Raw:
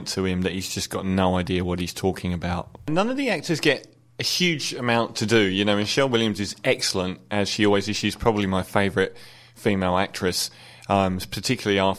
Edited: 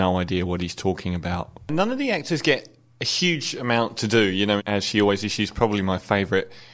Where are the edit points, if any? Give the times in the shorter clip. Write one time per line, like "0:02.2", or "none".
0:04.6